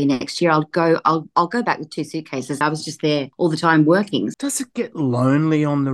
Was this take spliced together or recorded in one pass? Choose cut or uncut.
cut